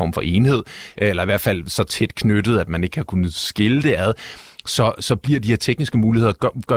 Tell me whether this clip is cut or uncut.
uncut